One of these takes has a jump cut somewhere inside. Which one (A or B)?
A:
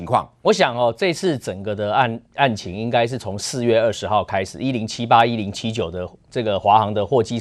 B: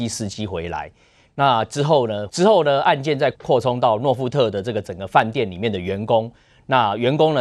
B